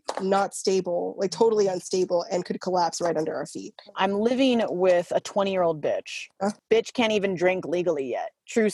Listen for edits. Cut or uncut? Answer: cut